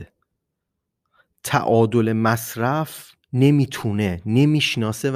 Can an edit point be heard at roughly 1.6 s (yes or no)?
no